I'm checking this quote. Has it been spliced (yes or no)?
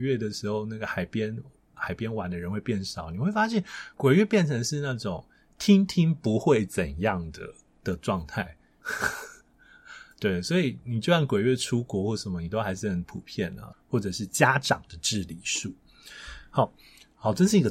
yes